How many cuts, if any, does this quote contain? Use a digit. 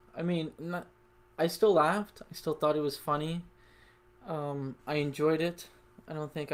0